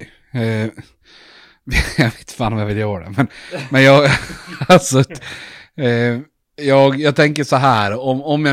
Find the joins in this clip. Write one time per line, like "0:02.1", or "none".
none